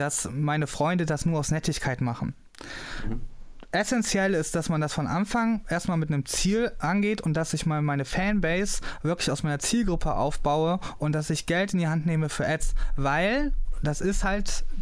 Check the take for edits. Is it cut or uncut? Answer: uncut